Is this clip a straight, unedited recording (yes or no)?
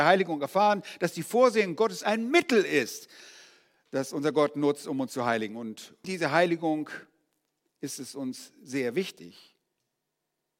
no